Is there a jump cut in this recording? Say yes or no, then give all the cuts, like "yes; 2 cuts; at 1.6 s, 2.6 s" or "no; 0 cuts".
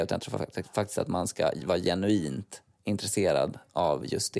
no; 0 cuts